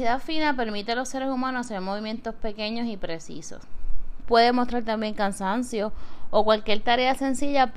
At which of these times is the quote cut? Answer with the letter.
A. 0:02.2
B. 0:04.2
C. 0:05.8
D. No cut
B